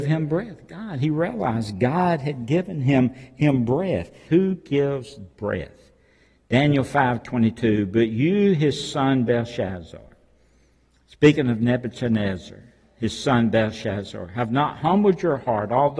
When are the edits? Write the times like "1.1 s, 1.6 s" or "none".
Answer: 4.3 s